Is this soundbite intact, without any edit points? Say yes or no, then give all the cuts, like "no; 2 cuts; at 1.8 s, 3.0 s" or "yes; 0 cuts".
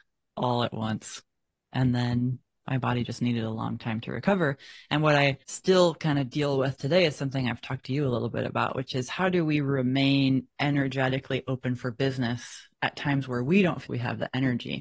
no; 3 cuts; at 2.6 s, 5.4 s, 13.9 s